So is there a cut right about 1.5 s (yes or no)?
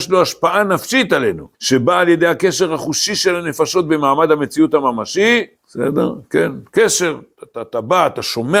yes